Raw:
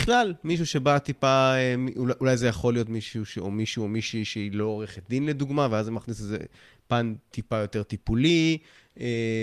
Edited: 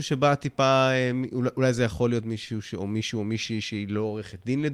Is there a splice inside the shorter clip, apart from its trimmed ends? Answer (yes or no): no